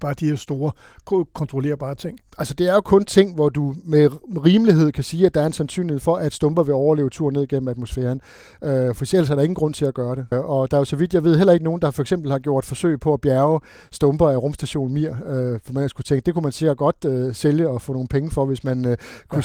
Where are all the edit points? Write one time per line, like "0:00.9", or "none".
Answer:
0:10.3